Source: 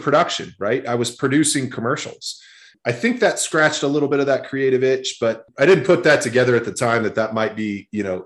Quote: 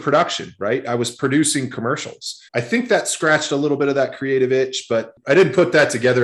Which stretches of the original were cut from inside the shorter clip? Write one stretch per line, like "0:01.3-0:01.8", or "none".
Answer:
0:02.5-0:02.8

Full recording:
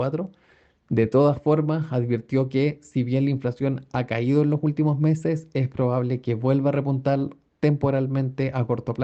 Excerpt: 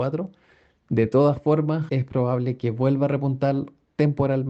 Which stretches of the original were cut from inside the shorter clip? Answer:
0:01.9-0:05.5

